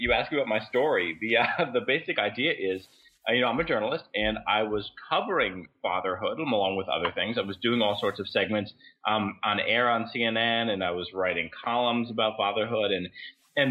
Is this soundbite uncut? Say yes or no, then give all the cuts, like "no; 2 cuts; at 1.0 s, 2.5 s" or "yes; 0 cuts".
yes; 0 cuts